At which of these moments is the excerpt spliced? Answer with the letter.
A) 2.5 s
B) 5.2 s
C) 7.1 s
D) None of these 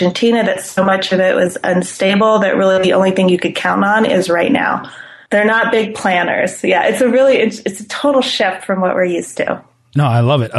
D